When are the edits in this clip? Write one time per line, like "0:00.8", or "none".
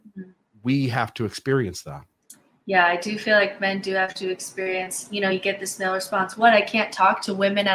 none